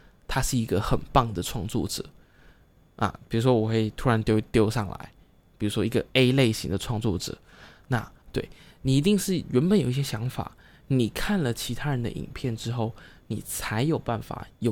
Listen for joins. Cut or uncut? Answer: cut